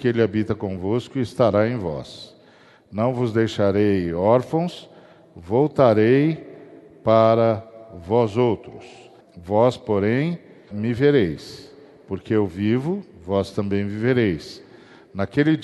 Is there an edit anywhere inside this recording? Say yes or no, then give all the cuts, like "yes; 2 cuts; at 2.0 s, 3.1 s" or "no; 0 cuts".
yes; 2 cuts; at 9.2 s, 10.7 s